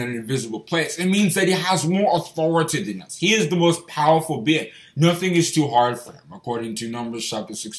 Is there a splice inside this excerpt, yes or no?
no